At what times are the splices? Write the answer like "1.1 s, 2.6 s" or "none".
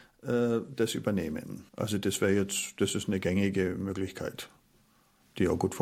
1.7 s